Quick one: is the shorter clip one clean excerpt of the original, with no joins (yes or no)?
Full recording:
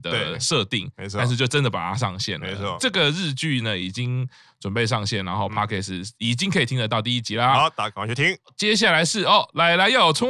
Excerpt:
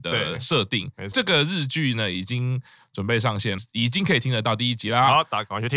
no